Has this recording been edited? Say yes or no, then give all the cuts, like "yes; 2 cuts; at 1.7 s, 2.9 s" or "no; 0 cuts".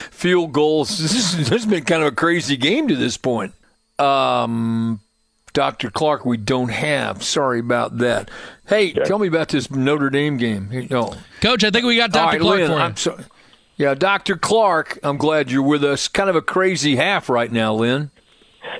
yes; 1 cut; at 8.9 s